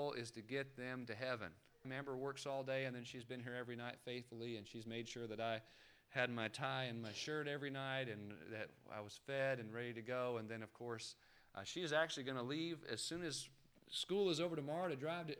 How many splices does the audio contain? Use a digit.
1